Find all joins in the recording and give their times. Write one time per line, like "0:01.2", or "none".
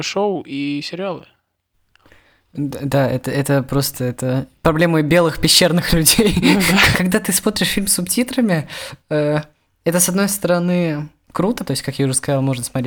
0:06.9
0:11.7

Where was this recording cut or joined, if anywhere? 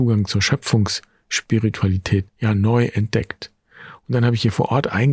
0:02.3

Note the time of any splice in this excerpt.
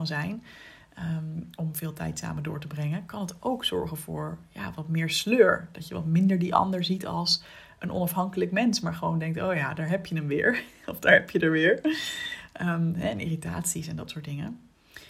none

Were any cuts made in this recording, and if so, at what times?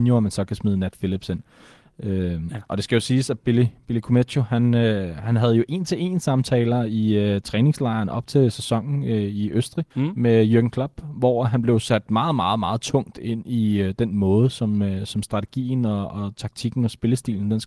0:09.9

